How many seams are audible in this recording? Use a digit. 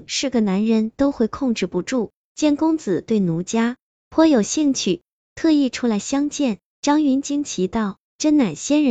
2